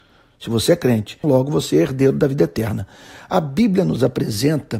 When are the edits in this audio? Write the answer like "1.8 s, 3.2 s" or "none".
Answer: 1.2 s